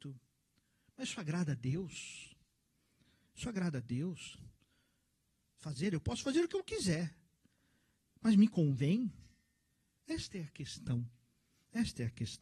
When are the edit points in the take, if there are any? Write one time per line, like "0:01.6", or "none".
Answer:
none

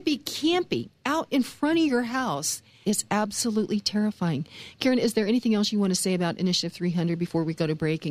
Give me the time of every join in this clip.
0:02.8

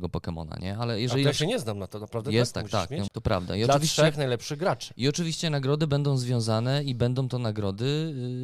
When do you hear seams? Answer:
0:03.1

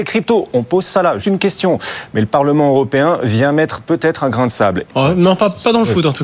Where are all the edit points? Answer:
0:01.2
0:04.9

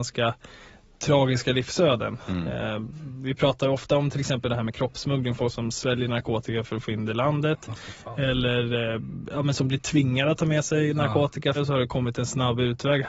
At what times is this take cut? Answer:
0:11.6

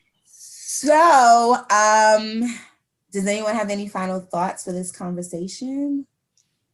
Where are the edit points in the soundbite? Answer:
none

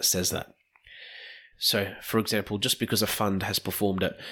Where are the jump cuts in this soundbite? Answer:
0:01.5

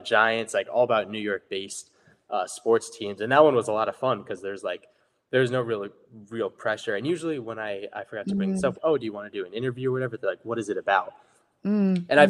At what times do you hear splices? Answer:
0:08.7

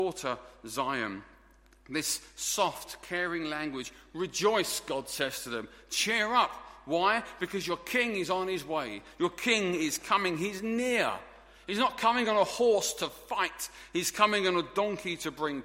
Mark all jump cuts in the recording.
none

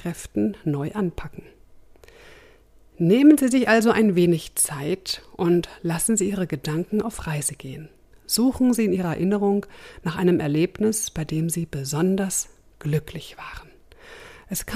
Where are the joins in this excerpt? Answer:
none

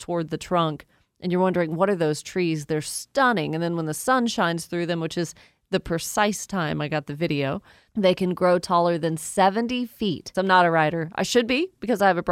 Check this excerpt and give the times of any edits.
0:07.9
0:10.3

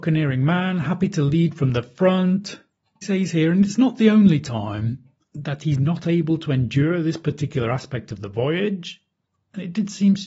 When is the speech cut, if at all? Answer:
0:03.0

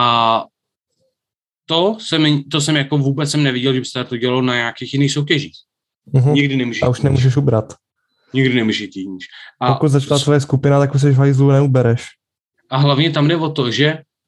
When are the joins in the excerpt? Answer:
0:06.0

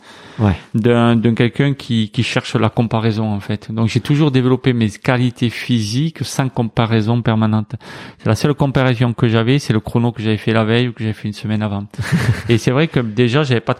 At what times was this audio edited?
none

